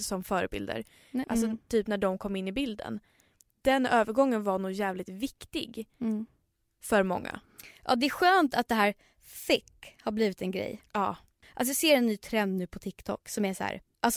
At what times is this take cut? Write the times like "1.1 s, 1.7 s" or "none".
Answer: 1.2 s